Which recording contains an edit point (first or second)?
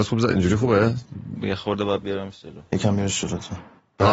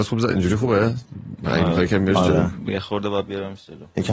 first